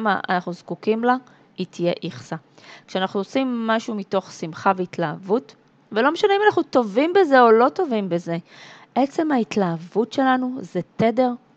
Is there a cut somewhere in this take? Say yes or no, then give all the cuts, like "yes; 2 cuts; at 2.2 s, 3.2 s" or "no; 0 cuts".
no; 0 cuts